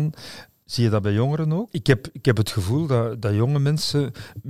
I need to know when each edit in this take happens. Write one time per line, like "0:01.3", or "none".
0:01.7